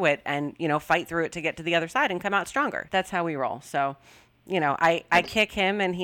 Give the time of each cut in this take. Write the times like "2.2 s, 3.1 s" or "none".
2.9 s